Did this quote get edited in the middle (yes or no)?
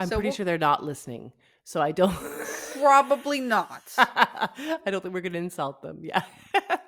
no